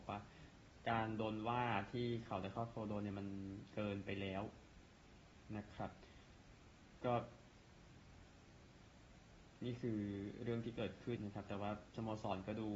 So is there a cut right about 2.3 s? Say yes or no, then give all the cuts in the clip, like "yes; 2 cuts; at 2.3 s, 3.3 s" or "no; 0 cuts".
no; 1 cut; at 11.2 s